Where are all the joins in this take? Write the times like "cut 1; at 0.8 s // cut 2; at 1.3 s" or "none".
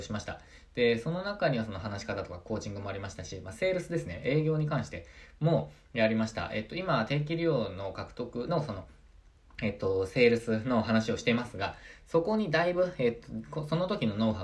none